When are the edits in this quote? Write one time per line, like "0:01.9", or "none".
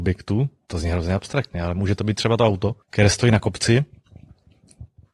0:02.8